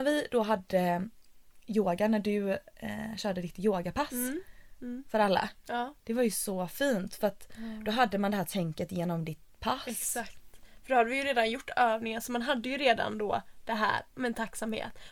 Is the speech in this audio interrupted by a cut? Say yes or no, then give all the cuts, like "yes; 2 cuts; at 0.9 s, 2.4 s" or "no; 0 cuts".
no; 0 cuts